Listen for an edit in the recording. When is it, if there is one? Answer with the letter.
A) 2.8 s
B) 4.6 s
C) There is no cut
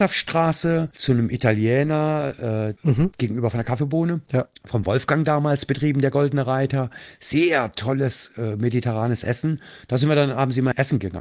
A